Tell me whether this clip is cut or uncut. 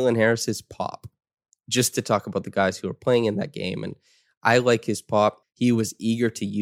cut